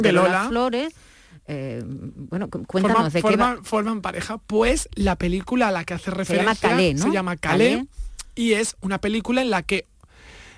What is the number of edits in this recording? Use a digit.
0